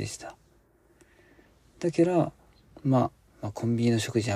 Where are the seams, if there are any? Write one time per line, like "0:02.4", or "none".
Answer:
0:03.3